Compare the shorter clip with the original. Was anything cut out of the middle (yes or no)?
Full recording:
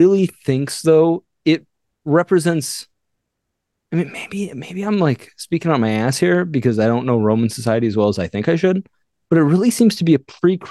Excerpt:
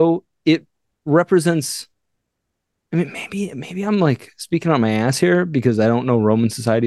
no